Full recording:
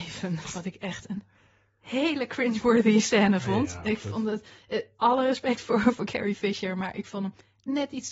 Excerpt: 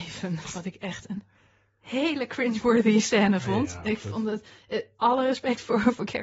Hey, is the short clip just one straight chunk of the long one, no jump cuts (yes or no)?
yes